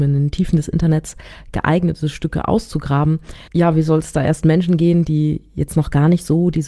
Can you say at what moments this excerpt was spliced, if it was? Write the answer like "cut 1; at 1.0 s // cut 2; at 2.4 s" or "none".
cut 1; at 3.5 s